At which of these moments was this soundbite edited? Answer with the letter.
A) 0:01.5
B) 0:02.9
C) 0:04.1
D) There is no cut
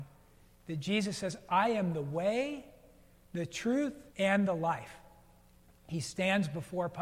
C